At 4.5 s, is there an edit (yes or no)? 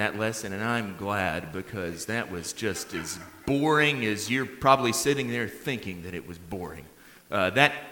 no